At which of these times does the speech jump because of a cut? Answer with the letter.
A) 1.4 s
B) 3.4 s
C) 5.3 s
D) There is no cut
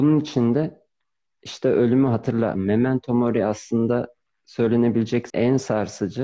C